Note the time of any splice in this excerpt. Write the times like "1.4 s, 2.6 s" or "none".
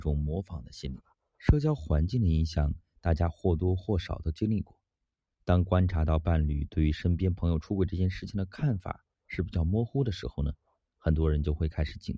none

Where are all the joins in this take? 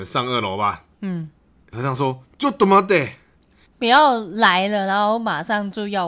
3.6 s

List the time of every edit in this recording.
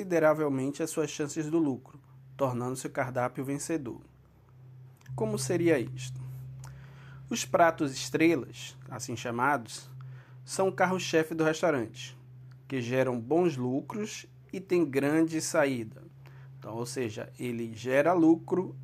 5.1 s

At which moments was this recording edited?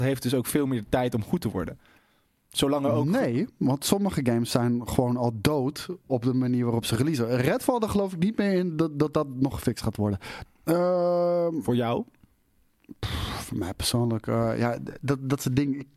10.5 s

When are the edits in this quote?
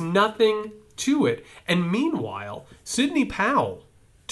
none

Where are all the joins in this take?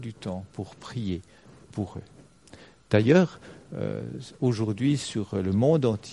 none

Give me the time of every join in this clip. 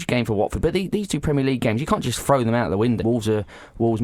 3.0 s

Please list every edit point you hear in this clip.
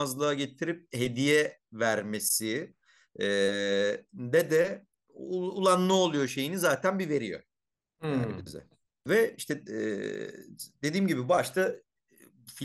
9.1 s

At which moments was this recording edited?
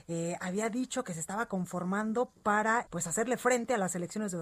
2.9 s

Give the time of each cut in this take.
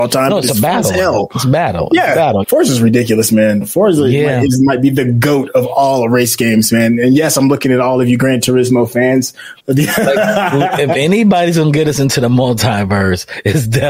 2.4 s, 9.6 s

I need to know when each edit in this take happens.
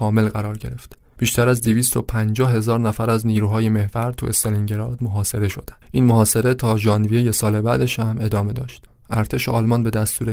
5.8 s

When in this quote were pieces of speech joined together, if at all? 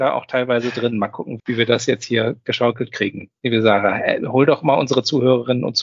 1.4 s

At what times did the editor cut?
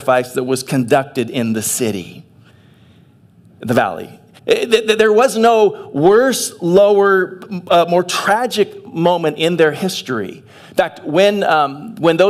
4.4 s

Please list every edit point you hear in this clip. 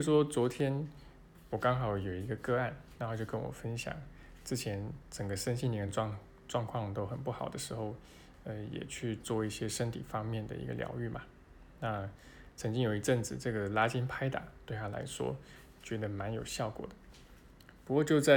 none

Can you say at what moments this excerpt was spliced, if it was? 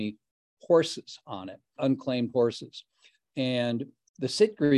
1.8 s

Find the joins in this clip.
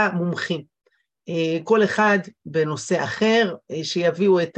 none

